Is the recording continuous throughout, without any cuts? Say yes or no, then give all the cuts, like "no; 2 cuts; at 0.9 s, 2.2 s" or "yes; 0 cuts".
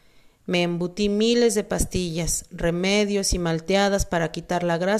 yes; 0 cuts